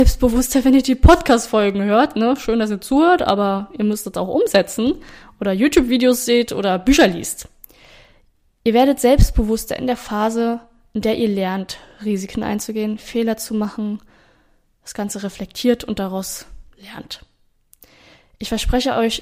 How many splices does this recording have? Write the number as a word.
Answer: zero